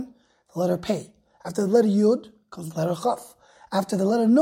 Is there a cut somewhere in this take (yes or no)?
no